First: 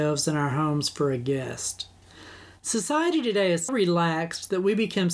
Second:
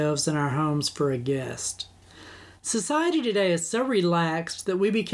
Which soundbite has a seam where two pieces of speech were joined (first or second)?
first